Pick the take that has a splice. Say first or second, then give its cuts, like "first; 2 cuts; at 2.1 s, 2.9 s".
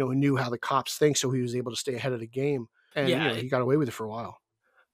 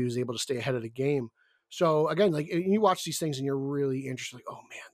first; 1 cut; at 2.9 s